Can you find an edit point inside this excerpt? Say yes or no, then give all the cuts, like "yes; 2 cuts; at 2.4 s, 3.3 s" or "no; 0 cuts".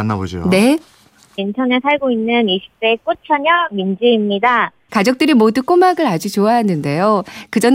yes; 2 cuts; at 1.4 s, 4.9 s